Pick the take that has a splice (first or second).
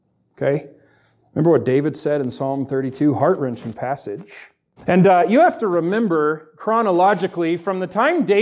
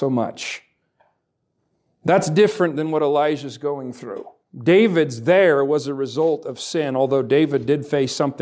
first